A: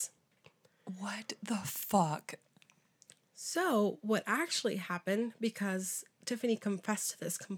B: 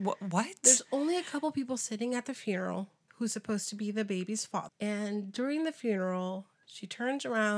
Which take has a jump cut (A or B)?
B